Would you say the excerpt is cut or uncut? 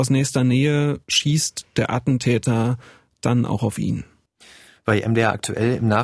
cut